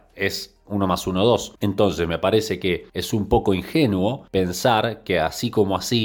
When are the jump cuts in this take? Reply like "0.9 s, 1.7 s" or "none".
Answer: 1.6 s